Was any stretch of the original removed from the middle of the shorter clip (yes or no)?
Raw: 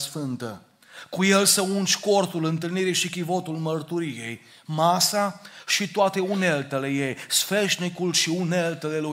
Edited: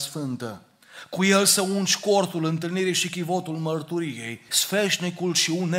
yes